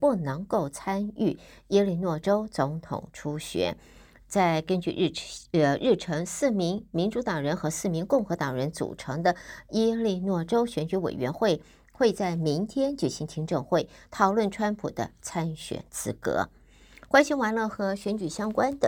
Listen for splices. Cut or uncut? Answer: uncut